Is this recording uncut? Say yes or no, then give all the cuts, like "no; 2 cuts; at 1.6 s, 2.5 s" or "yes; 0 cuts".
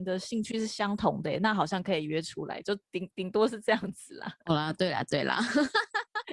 yes; 0 cuts